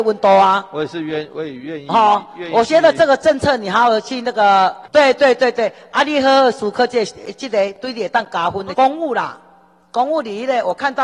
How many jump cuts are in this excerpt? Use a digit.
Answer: 2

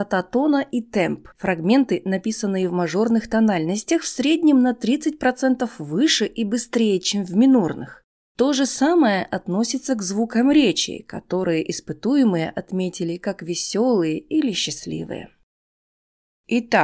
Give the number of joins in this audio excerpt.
1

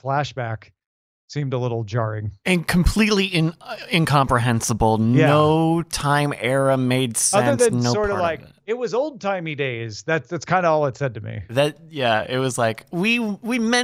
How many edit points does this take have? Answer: 0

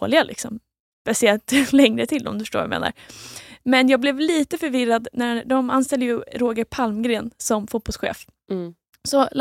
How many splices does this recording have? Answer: 0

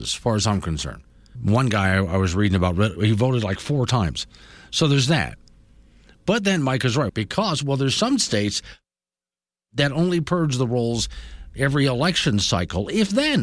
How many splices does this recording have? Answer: 2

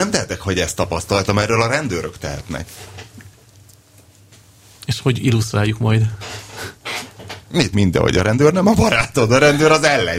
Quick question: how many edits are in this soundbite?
1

